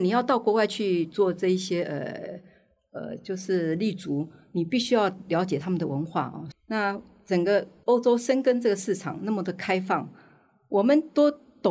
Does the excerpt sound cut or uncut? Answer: cut